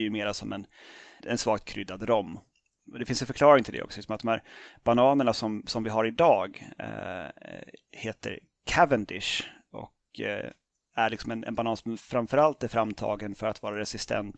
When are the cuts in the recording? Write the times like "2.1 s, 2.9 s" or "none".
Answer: 1.2 s